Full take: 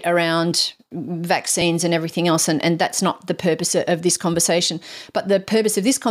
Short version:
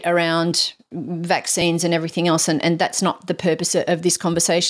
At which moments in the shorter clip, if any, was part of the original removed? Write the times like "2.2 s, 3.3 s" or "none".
none